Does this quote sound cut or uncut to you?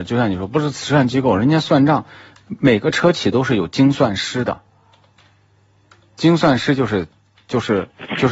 uncut